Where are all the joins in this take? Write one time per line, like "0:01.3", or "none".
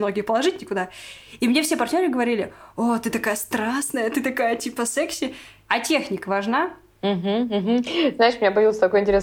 0:05.7